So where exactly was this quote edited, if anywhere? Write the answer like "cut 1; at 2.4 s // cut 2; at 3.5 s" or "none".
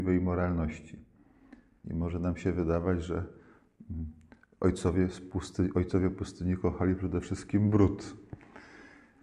cut 1; at 1.8 s